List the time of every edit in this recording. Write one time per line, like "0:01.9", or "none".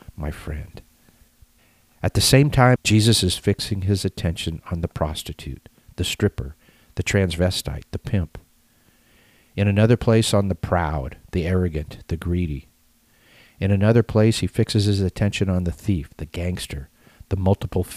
0:02.8